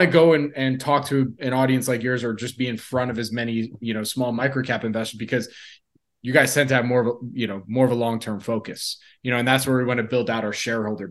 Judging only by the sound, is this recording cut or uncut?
uncut